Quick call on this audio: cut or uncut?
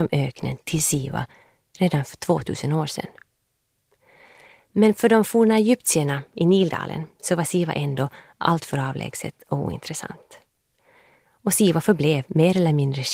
uncut